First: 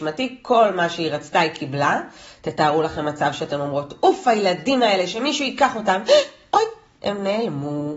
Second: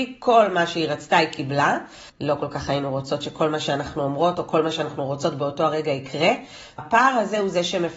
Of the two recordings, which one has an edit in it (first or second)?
second